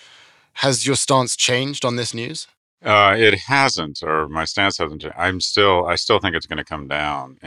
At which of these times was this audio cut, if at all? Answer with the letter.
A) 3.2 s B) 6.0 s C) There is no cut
C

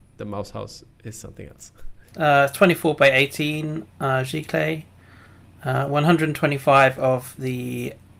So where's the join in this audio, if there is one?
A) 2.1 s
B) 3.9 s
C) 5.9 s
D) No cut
A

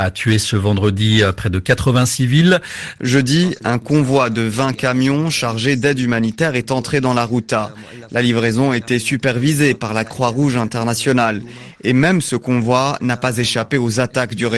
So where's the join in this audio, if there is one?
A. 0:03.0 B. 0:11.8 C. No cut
A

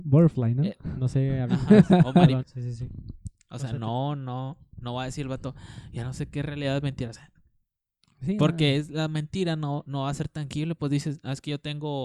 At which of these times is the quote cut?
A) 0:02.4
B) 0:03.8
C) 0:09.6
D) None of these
A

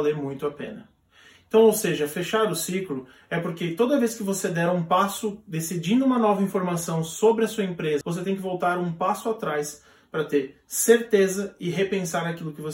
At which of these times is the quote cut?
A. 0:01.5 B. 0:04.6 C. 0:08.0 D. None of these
C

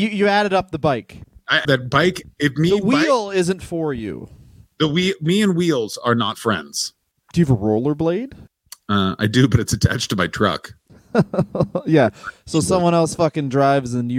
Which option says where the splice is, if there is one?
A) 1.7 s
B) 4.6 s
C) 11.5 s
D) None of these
A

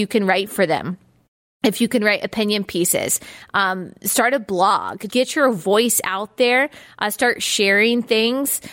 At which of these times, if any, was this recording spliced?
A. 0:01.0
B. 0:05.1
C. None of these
B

